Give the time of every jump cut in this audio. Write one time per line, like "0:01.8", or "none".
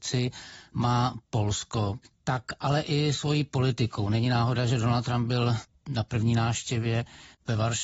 0:02.0